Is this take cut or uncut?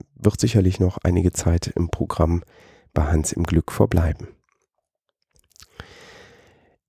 uncut